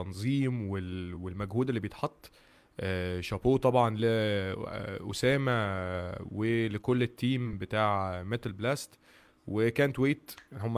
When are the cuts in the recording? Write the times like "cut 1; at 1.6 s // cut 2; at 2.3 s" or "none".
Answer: none